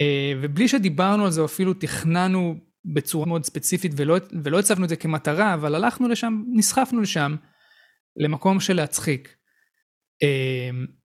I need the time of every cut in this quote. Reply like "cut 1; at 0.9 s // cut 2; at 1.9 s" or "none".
cut 1; at 3.2 s